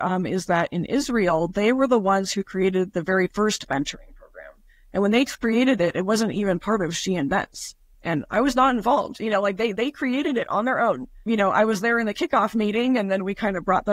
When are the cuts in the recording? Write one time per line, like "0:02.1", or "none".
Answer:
0:07.9